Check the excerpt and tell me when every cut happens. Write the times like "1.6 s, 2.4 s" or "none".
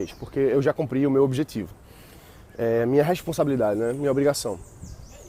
none